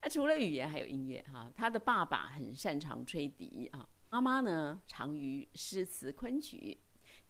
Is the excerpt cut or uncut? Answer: cut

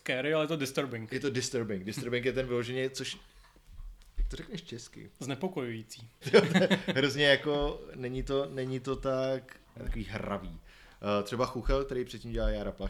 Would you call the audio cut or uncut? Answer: cut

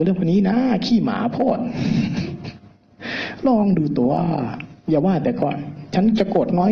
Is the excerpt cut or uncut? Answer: cut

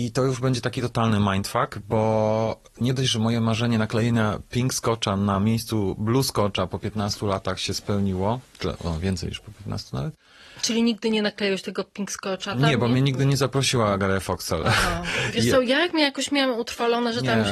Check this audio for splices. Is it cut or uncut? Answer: uncut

